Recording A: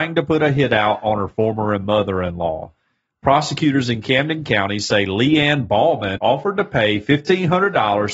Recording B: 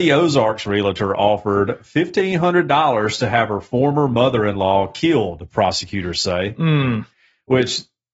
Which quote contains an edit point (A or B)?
A